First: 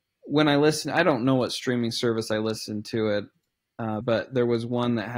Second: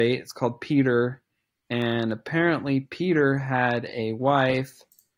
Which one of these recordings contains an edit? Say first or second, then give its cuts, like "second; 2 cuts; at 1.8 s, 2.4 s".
first; 1 cut; at 4.0 s